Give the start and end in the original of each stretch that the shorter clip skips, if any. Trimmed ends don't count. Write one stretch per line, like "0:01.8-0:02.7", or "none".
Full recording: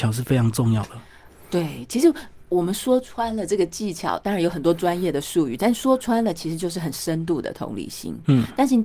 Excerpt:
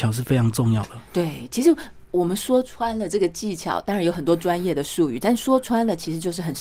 0:01.1-0:01.4